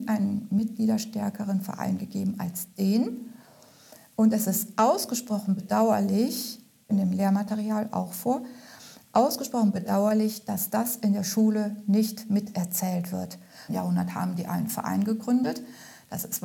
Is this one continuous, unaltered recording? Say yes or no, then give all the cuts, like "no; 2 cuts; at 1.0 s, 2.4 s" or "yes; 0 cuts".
no; 2 cuts; at 6.9 s, 13.7 s